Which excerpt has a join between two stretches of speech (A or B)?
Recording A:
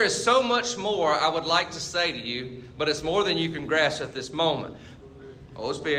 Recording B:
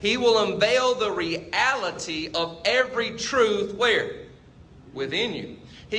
A